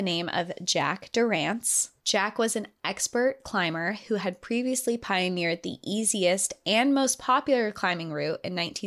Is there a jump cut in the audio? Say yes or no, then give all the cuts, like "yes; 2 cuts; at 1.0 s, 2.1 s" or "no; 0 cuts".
no; 0 cuts